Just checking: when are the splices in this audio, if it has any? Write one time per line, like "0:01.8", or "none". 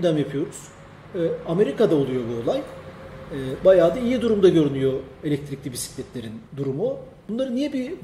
0:06.5